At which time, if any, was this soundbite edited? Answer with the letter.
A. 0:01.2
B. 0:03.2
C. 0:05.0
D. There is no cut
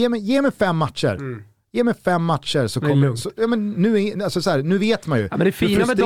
D